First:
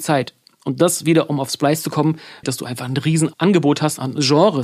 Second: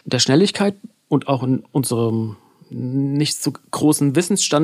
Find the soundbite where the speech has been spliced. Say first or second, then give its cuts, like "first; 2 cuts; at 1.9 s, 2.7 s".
first; 1 cut; at 2.4 s